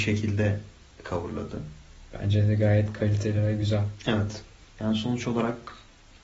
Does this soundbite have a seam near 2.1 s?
no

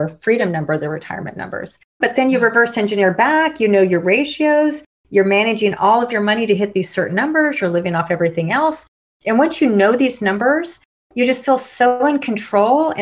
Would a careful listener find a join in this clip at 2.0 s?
yes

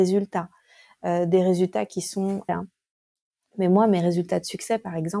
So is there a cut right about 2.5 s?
yes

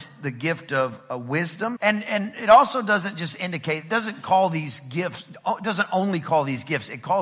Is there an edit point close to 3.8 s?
no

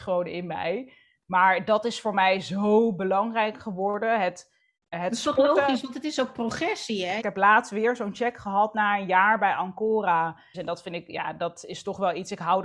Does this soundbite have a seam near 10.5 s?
yes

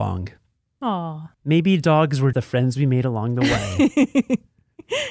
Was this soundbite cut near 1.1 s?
no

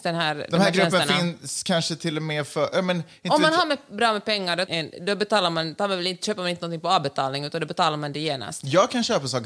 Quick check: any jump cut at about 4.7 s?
yes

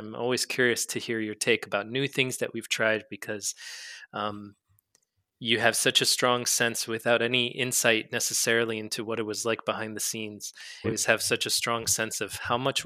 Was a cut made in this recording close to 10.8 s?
yes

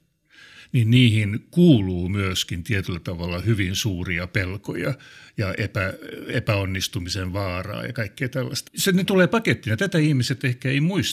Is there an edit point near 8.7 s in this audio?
yes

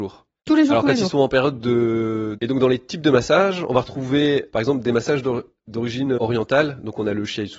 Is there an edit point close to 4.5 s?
yes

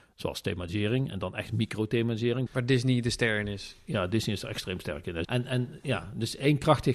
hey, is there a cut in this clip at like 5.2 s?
yes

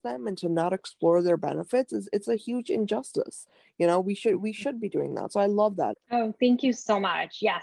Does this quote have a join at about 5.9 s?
yes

